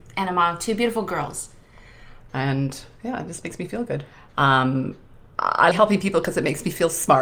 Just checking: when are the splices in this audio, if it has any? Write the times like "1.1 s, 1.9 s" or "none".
2.2 s, 4.3 s, 5.7 s